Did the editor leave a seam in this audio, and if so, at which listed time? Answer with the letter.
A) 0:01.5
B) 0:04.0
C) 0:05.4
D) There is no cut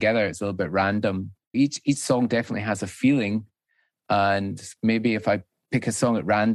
A